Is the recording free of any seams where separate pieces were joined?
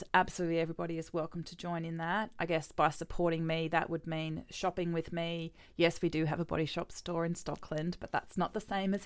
yes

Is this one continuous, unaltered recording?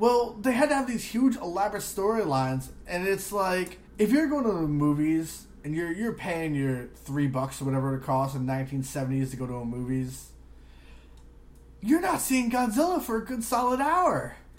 no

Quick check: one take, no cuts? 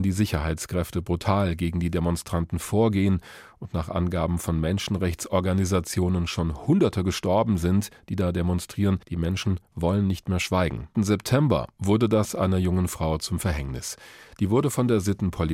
no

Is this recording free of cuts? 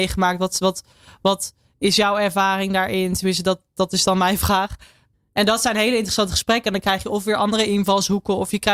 yes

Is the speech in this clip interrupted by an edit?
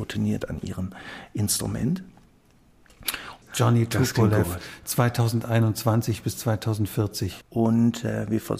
yes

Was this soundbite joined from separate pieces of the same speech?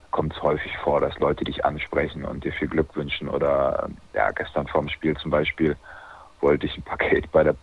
no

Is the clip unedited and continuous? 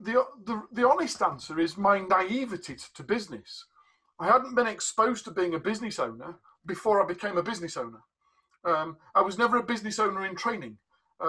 yes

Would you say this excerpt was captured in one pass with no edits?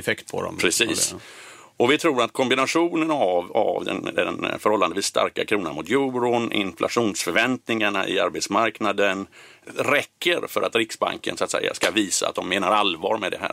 yes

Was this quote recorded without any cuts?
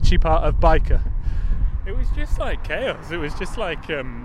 yes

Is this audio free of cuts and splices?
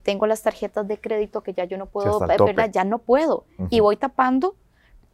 yes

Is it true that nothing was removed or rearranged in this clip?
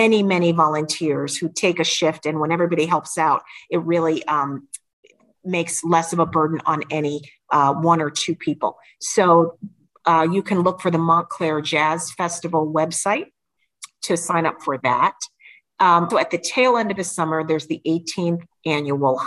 no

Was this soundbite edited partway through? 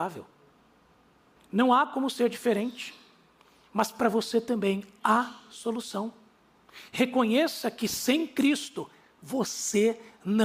yes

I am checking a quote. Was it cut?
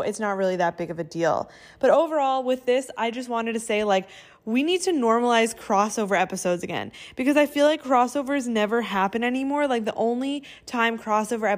no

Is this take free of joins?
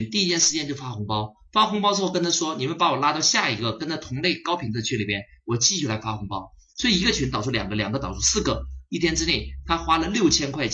yes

